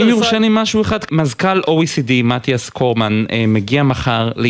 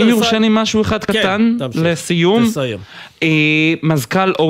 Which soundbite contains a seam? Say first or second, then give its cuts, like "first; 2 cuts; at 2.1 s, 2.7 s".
first; 1 cut; at 1.1 s